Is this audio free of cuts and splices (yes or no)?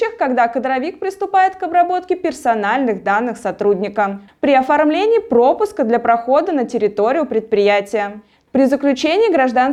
no